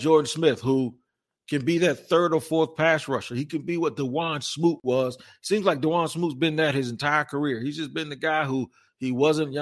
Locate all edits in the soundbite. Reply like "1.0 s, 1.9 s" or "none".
none